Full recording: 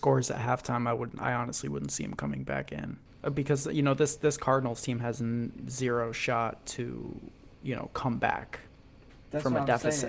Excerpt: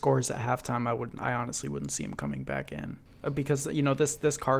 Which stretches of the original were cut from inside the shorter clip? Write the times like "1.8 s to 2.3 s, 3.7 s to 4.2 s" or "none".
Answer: none